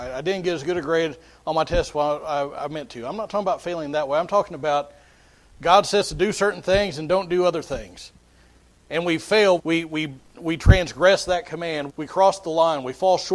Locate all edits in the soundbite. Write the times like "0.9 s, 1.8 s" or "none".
9.6 s, 11.9 s